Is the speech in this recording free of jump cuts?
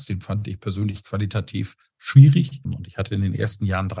no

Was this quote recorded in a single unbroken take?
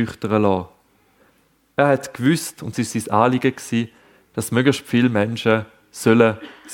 yes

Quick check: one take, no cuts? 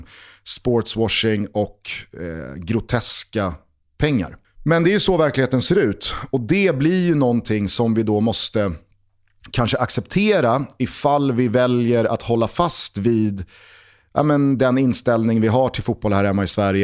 no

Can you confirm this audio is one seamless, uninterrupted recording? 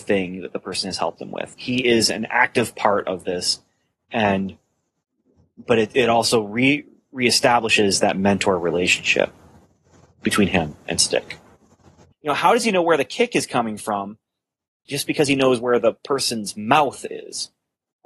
no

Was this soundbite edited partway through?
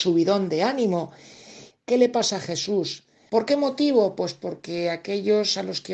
yes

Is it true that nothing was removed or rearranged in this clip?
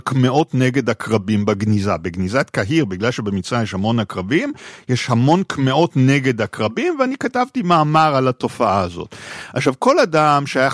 yes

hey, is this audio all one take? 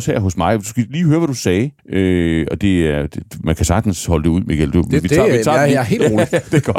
no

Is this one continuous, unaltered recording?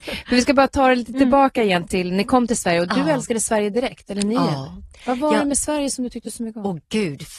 no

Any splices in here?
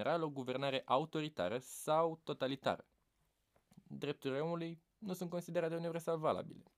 no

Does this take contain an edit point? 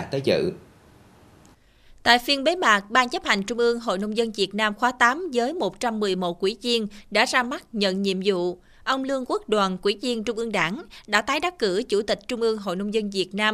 no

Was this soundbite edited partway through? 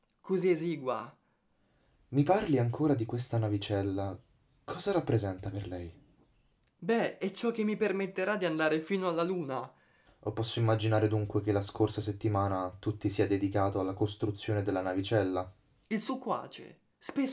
yes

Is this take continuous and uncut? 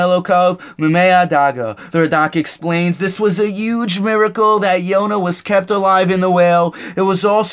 no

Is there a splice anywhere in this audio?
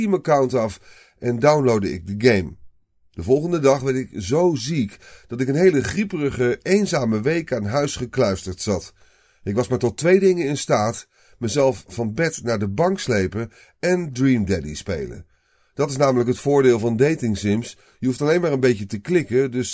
no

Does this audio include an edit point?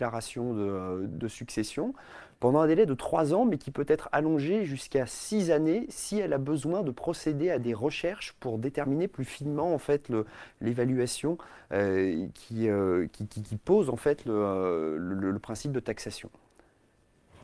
no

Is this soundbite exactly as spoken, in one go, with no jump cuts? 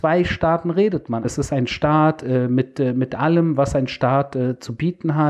no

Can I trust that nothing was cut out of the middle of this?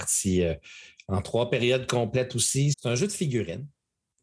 no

